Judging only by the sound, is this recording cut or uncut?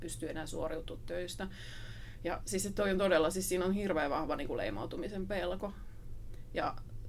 uncut